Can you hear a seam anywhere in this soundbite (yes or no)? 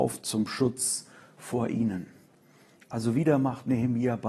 no